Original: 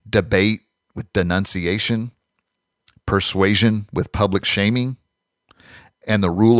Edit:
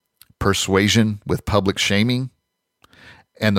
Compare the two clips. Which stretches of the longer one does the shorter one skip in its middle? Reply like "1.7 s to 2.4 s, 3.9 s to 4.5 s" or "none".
none